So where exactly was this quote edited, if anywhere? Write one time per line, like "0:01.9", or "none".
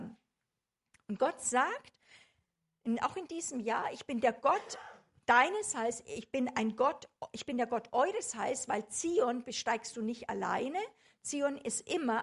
none